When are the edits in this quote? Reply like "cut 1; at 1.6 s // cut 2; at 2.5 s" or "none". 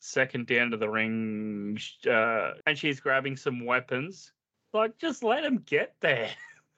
cut 1; at 2.6 s // cut 2; at 4.5 s

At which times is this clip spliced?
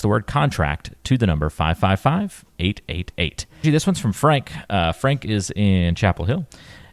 cut 1; at 3.6 s

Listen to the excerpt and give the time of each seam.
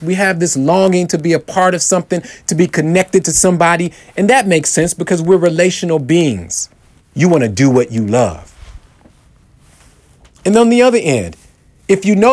cut 1; at 7.0 s

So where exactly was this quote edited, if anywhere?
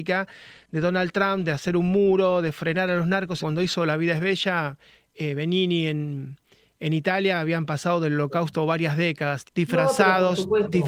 cut 1; at 3.4 s // cut 2; at 9.4 s

